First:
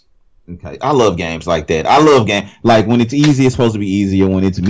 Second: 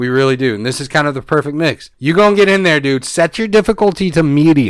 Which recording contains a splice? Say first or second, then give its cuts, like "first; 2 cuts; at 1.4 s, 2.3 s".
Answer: second; 1 cut; at 1.9 s